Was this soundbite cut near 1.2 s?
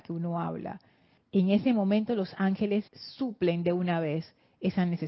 yes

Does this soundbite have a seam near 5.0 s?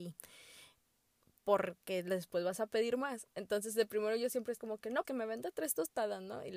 yes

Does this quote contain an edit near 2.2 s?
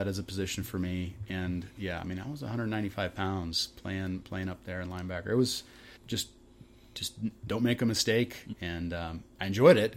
no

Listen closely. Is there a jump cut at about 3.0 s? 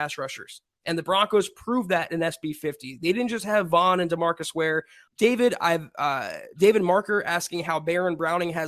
no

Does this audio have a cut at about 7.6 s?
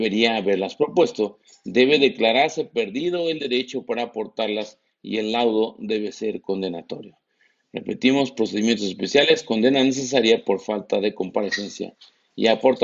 no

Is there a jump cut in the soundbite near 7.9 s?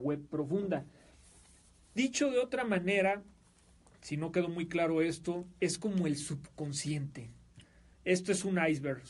yes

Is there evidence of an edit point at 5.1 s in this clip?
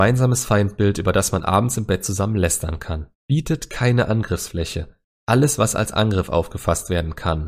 yes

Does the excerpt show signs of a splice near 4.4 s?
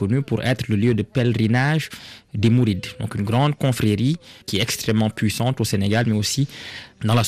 yes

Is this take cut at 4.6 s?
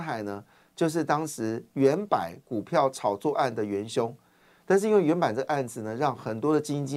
yes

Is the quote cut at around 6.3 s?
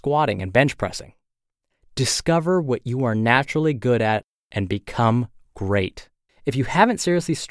yes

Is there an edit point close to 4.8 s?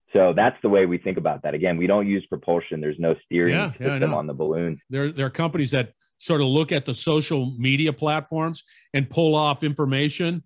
yes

